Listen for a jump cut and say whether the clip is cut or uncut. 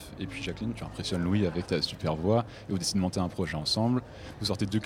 cut